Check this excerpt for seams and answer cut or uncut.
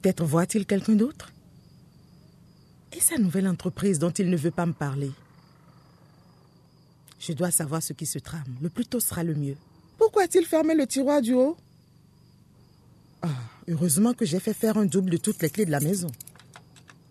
cut